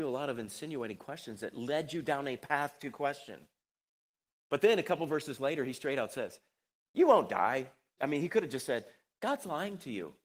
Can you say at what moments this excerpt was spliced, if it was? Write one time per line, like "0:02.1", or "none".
0:08.0